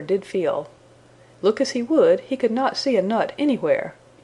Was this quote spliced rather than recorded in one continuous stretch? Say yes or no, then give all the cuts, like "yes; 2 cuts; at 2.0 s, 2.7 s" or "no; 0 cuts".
yes; 1 cut; at 1.3 s